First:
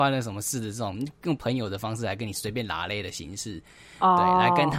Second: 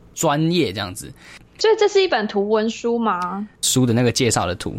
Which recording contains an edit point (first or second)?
second